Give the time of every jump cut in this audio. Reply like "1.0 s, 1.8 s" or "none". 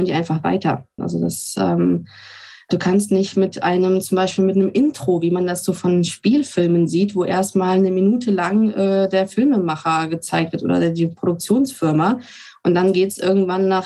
1.0 s